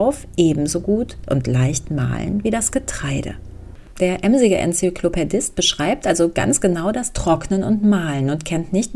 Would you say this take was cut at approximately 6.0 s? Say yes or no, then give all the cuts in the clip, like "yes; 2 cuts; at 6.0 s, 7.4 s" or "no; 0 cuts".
no; 1 cut; at 3.9 s